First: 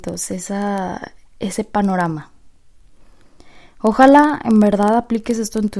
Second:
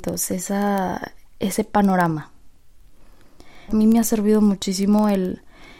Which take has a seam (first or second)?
second